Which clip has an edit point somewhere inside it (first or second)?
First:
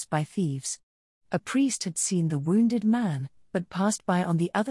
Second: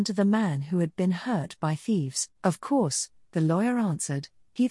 second